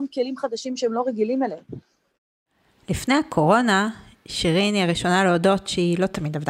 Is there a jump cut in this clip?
no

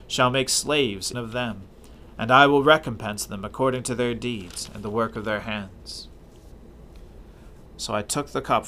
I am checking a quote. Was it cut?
yes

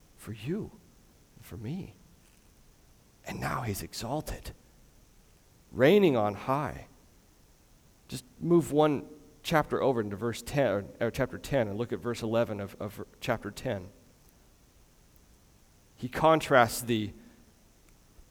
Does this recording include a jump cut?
no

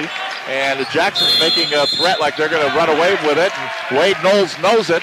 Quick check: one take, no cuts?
yes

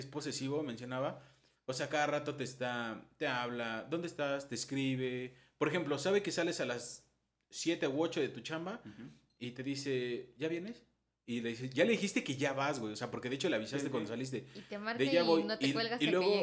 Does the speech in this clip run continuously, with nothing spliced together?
yes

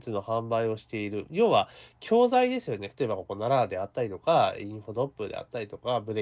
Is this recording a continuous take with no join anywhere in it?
no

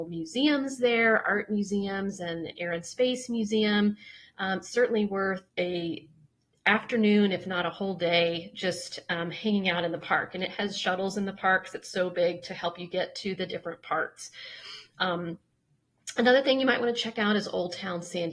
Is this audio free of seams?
no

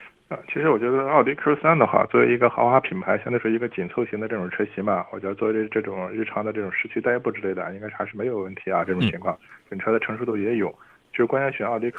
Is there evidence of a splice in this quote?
no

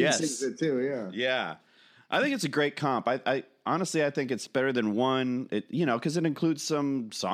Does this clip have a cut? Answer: no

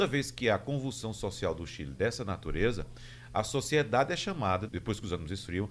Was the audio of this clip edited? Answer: yes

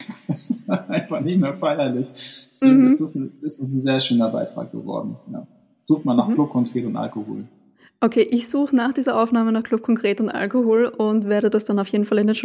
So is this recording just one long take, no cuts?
yes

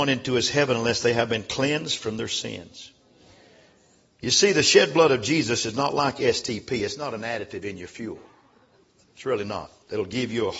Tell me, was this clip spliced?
no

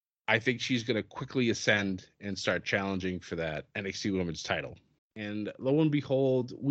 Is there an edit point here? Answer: yes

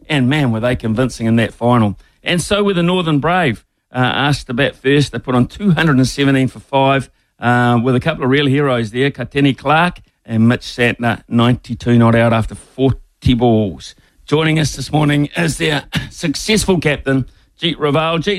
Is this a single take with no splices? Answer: yes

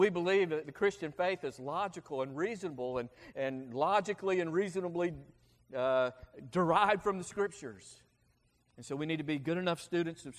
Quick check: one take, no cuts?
no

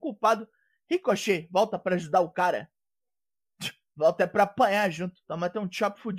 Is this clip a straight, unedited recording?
no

